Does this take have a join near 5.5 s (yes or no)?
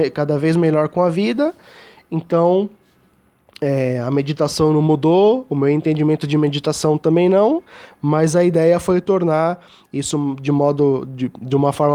no